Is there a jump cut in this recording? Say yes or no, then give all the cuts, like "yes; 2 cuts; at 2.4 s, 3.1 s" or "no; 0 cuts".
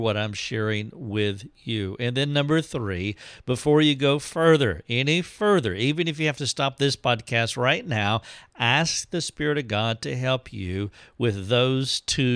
no; 0 cuts